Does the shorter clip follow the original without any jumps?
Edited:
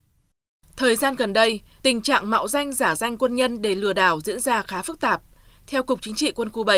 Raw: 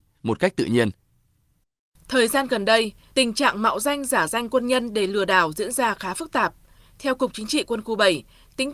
yes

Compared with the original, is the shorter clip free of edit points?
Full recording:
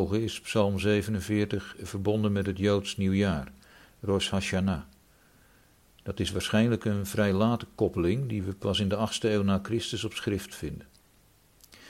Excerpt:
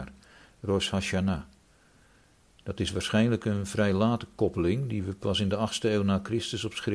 yes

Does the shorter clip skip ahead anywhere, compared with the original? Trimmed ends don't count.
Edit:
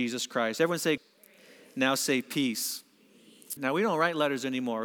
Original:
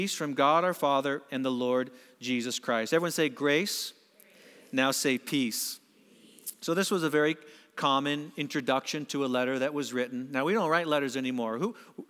yes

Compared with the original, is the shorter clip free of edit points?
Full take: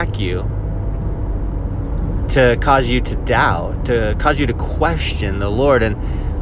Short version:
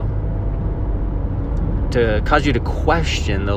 no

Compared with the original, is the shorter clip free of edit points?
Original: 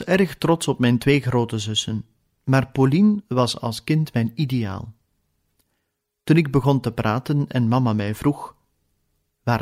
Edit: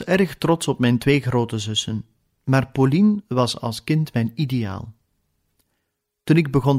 yes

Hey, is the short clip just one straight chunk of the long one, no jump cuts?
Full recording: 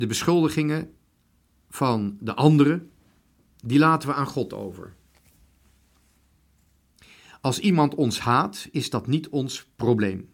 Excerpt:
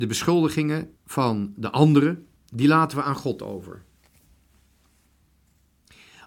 no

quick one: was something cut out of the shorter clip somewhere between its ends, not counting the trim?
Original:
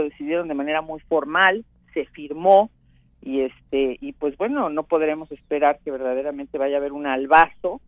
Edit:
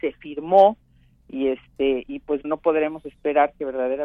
yes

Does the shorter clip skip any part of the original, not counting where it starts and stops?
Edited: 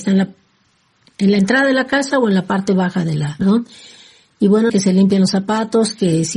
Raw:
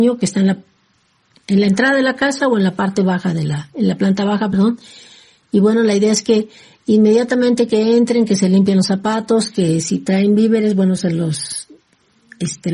yes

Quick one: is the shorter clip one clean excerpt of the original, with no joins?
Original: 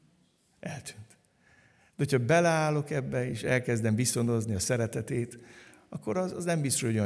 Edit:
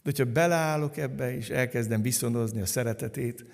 yes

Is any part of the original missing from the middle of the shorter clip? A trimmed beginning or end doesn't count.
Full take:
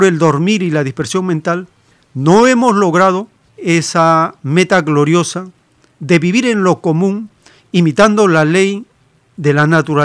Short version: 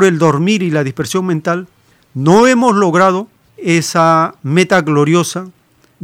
no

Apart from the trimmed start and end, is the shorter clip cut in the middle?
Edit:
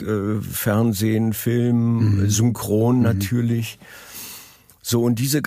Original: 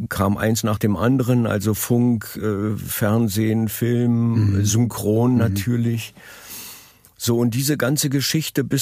no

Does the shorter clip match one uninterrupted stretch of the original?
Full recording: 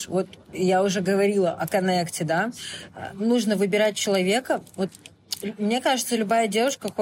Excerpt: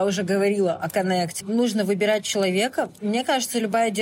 no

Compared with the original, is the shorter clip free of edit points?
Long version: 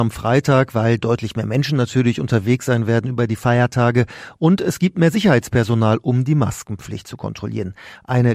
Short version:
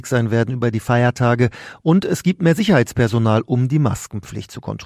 yes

